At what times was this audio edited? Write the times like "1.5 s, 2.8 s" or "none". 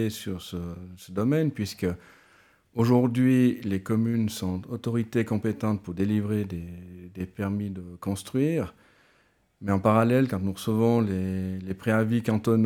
none